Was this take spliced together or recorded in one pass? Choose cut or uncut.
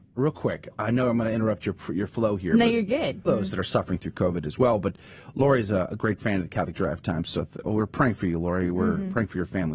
cut